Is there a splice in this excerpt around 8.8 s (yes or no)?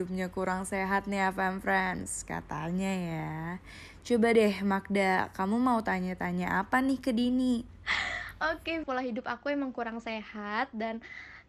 yes